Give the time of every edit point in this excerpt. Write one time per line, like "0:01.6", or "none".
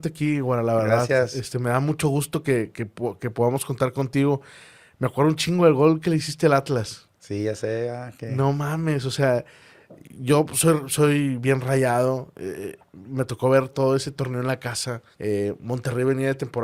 0:13.7
0:15.1